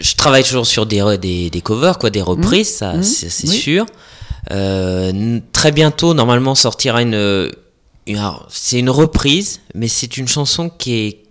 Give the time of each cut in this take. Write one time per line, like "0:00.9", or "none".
none